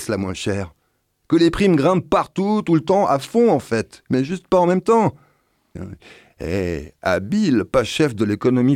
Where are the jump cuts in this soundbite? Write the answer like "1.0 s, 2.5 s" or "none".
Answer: 5.7 s